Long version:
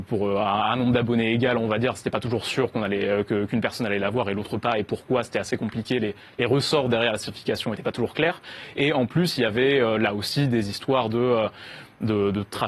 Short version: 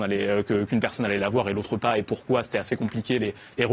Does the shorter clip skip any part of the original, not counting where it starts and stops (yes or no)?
no